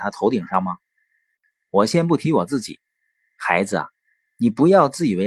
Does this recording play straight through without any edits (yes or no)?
no